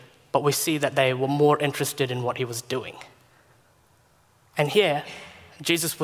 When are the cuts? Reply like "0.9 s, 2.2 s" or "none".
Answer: none